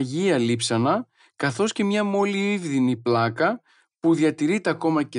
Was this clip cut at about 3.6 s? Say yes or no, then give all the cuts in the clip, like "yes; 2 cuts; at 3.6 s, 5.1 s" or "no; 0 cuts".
no; 0 cuts